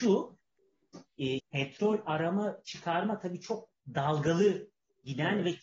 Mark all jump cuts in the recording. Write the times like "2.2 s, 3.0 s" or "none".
1.4 s